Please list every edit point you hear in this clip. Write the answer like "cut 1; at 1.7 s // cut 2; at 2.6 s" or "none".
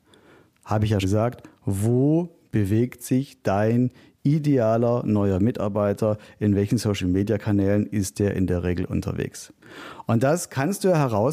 cut 1; at 1.0 s